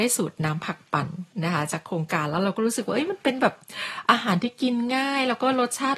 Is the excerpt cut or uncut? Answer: cut